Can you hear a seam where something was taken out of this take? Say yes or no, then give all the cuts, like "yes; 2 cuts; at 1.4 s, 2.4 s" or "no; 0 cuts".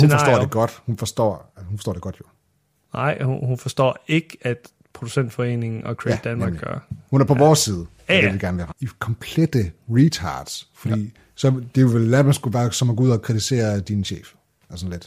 yes; 1 cut; at 8.7 s